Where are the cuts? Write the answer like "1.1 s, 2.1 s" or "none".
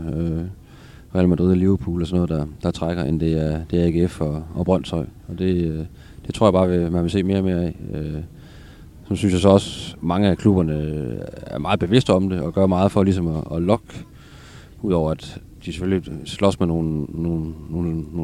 none